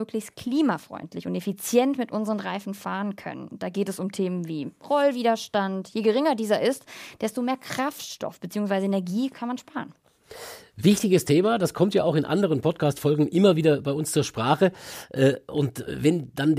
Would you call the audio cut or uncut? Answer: uncut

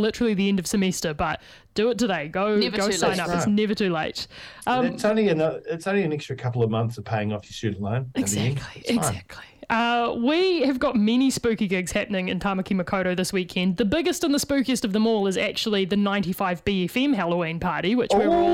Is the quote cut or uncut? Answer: uncut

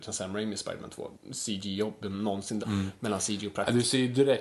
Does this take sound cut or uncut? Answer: cut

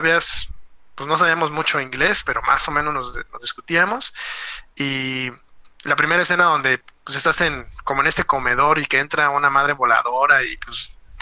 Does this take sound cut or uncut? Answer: uncut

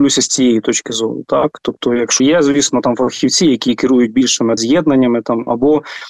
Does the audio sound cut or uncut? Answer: cut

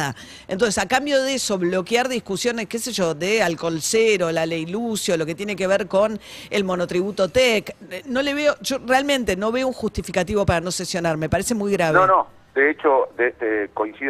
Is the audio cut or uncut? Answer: uncut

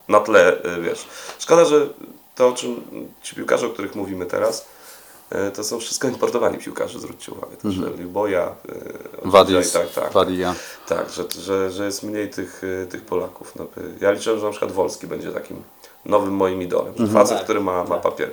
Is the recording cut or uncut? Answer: uncut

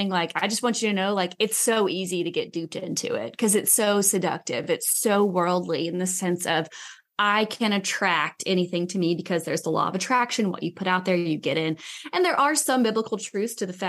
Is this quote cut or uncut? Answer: uncut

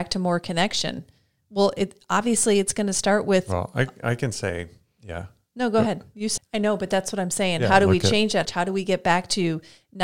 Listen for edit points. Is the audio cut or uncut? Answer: cut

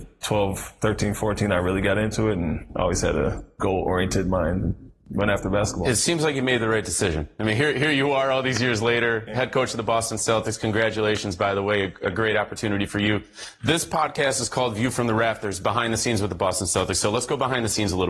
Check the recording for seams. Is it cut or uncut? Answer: uncut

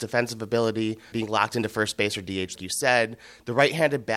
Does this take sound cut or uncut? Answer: cut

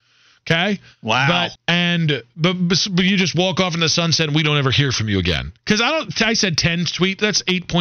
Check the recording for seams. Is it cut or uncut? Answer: cut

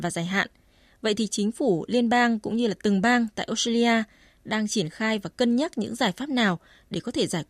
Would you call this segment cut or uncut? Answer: uncut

